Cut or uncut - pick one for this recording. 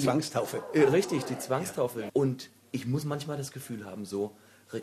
cut